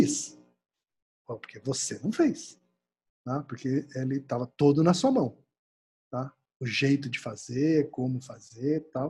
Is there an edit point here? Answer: no; 0 cuts

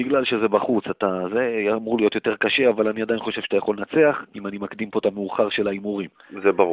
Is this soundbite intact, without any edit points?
no; 1 cut; at 4.3 s

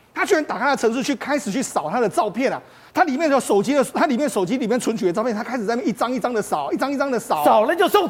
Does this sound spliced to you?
no; 0 cuts

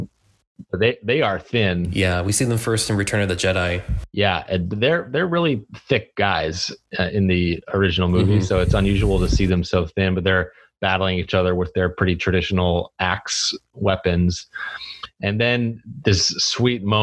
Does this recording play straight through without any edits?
yes; 0 cuts

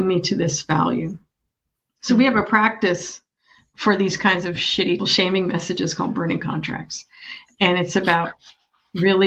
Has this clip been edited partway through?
yes; 1 cut; at 5.0 s

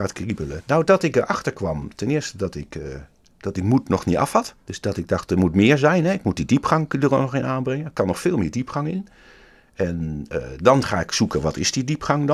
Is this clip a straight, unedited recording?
no; 1 cut; at 4.6 s

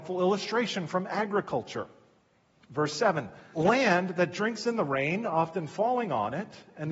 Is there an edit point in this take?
yes; 1 cut; at 3.5 s

